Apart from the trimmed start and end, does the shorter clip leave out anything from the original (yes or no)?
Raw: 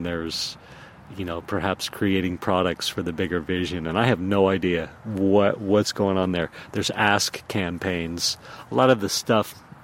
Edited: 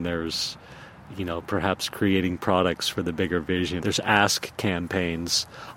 yes